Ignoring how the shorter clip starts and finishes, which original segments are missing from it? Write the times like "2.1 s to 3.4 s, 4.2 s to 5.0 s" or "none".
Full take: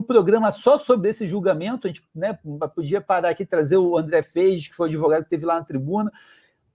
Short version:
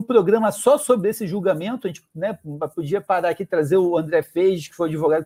none